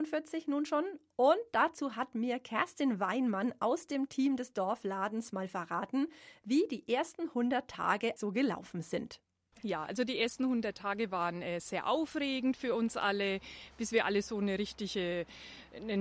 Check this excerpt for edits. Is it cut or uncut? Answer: cut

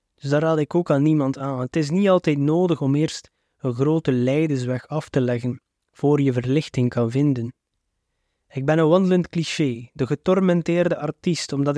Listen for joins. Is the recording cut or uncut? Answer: uncut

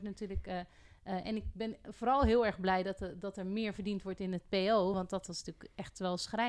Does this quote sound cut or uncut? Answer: uncut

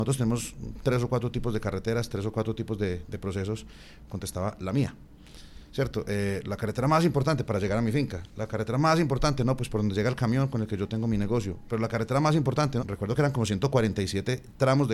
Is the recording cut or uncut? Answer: cut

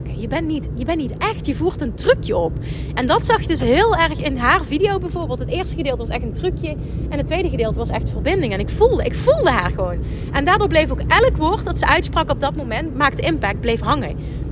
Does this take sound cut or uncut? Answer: uncut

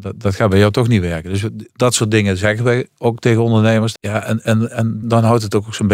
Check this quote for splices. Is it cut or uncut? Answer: cut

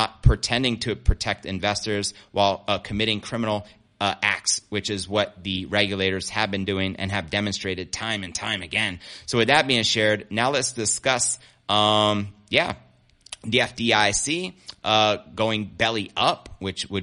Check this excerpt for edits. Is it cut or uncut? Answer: uncut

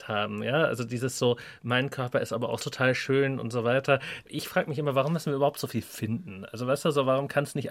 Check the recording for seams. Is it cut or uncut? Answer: cut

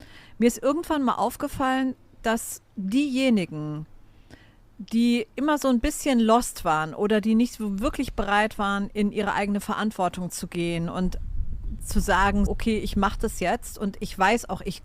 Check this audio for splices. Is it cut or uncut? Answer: cut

